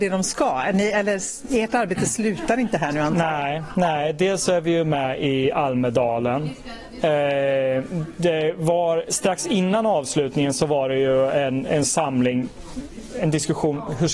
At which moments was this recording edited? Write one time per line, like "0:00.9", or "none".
none